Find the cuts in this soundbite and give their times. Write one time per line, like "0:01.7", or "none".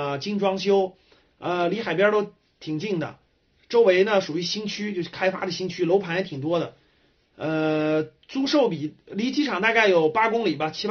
none

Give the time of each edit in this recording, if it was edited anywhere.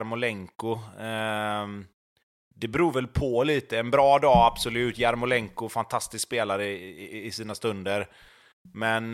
none

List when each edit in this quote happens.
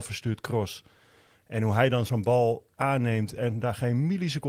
none

